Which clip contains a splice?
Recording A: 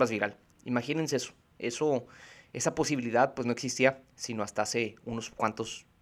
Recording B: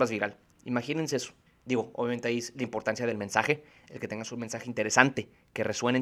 B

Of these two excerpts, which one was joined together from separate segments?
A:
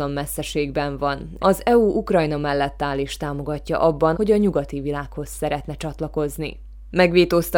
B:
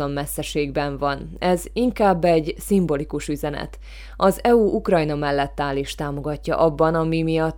A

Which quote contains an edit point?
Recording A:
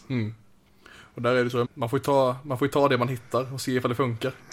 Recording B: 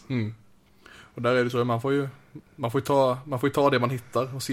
A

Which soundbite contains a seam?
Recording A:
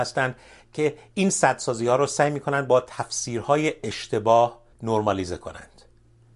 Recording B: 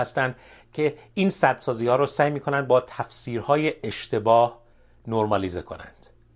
A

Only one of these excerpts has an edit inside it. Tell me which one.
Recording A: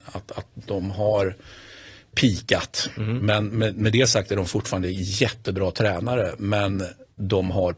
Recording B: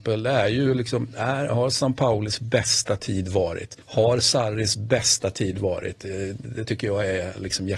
B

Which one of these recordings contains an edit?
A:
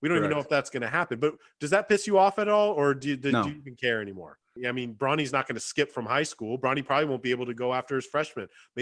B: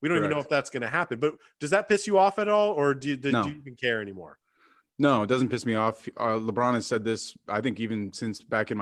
A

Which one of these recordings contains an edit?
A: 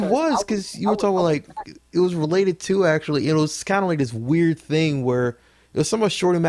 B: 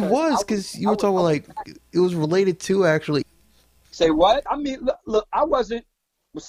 B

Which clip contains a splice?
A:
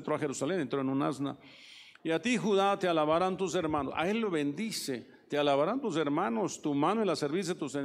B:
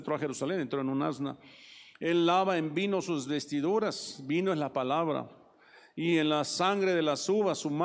A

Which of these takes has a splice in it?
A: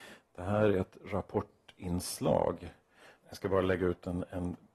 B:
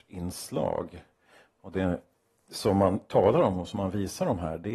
A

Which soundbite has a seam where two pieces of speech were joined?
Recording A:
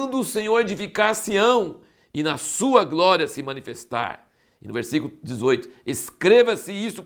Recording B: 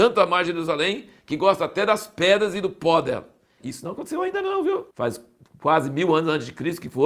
B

